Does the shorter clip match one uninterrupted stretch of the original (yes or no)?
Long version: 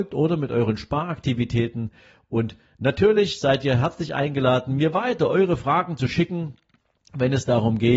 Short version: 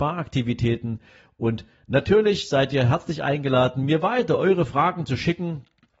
yes